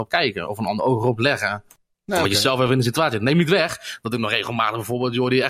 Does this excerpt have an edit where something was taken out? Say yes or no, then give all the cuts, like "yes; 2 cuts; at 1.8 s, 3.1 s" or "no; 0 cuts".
no; 0 cuts